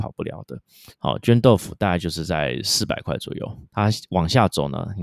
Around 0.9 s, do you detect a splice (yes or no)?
yes